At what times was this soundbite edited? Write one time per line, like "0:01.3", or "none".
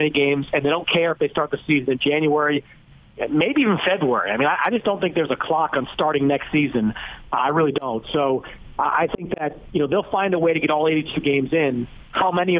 none